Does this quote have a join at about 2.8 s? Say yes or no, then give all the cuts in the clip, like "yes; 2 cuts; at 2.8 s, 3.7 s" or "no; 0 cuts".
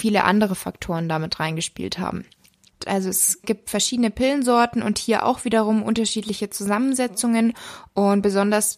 yes; 1 cut; at 2.8 s